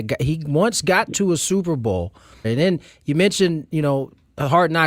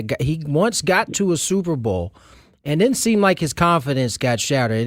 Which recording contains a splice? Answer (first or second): first